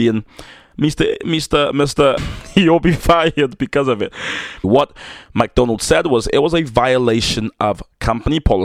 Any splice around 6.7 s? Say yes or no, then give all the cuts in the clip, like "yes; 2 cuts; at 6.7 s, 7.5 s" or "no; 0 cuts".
no; 2 cuts; at 2.2 s, 4.6 s